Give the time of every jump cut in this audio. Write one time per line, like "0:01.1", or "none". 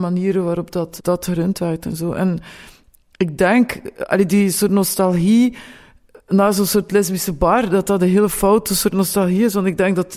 0:01.0